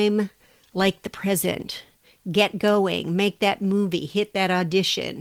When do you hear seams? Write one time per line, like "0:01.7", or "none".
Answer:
none